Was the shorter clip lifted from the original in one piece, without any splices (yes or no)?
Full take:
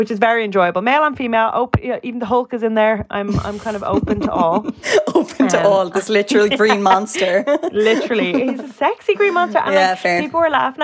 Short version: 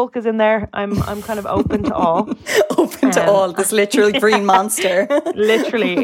yes